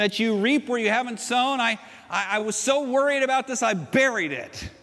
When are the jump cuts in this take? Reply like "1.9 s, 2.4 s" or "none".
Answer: none